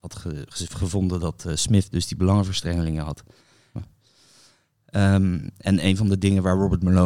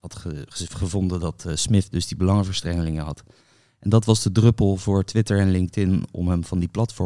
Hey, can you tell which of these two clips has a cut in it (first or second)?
first